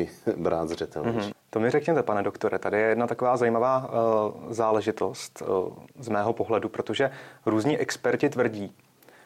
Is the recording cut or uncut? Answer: cut